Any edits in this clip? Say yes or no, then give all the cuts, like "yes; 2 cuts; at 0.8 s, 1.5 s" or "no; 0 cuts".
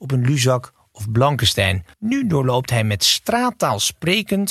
yes; 1 cut; at 1.9 s